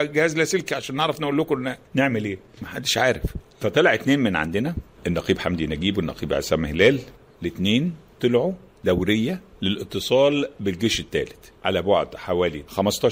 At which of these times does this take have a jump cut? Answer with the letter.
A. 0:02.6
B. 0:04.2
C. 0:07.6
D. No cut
A